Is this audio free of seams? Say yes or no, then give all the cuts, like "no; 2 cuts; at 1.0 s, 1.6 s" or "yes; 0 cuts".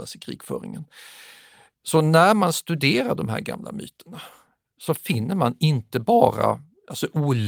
yes; 0 cuts